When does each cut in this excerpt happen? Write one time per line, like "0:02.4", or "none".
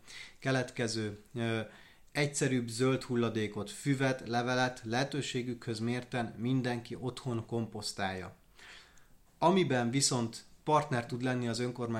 0:09.3